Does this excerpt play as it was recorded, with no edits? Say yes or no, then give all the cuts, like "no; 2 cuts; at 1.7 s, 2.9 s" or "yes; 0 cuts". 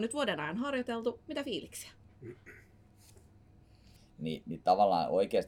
no; 1 cut; at 4.0 s